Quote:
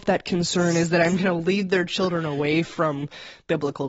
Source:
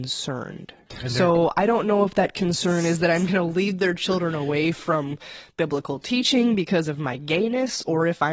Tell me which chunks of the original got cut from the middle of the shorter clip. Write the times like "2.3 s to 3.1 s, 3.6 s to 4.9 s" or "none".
none